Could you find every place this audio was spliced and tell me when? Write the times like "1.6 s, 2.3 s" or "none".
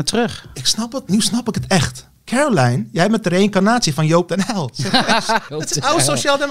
2.2 s, 5.5 s

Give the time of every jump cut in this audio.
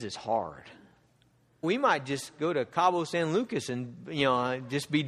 1.6 s

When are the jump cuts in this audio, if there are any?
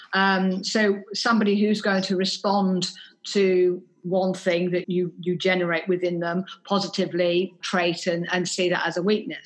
4.8 s, 7.6 s

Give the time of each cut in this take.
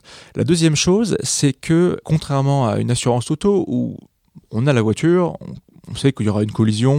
2.0 s

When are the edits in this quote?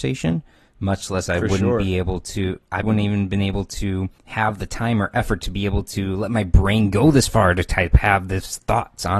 2.8 s, 4.2 s

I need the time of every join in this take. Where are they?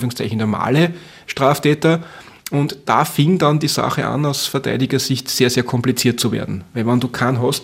none

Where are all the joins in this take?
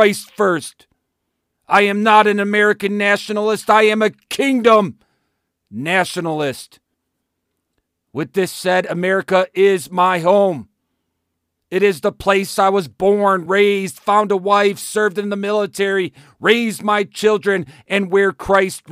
none

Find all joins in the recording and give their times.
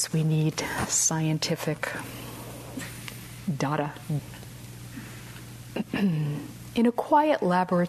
4.2 s

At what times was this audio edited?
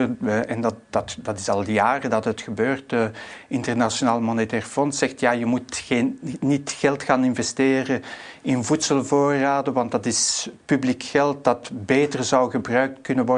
none

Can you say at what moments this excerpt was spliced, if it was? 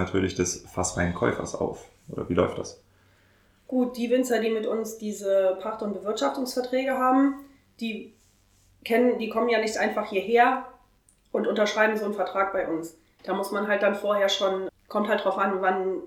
13.2 s, 14.7 s

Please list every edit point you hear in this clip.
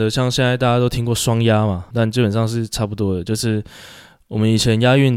1.9 s

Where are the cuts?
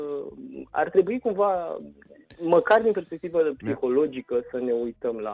none

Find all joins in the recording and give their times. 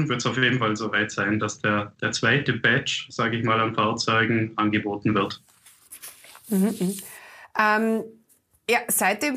none

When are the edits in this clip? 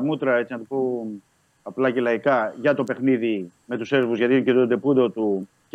3.6 s

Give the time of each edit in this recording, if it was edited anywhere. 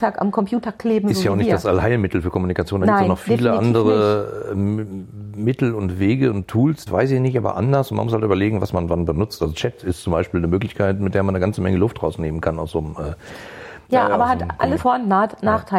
6.9 s, 14.8 s

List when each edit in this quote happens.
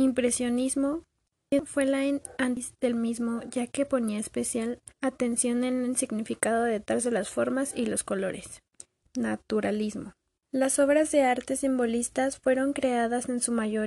4.9 s, 9.0 s

